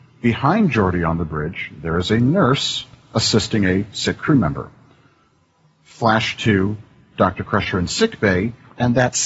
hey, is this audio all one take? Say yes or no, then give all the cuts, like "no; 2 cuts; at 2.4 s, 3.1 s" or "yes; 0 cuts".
yes; 0 cuts